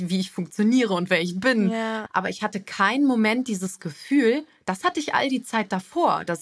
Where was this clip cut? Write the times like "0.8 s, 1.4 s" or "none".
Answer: 2.1 s